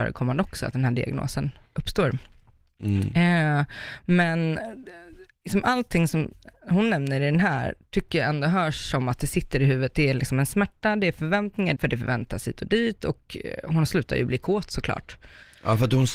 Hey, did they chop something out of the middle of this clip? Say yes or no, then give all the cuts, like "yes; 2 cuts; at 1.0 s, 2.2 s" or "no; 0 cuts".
yes; 1 cut; at 11.8 s